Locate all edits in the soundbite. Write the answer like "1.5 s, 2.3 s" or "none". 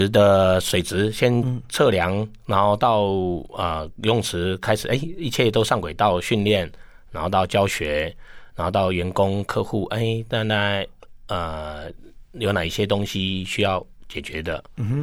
none

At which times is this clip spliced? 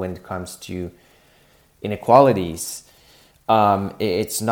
none

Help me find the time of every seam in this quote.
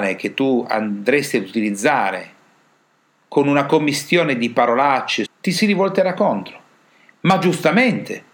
5.2 s

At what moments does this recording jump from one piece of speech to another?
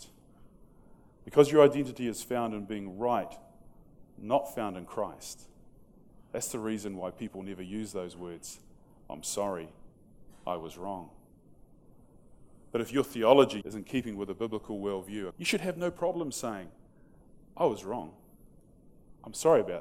13.6 s, 15.3 s

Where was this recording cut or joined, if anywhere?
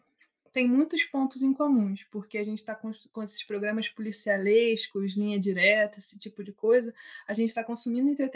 none

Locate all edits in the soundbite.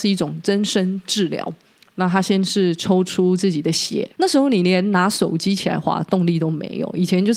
4.2 s

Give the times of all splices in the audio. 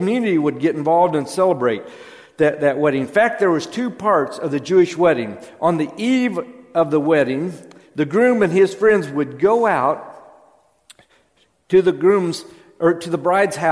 none

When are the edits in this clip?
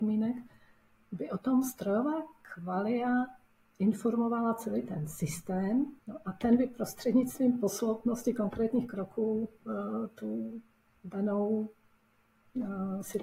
6.0 s

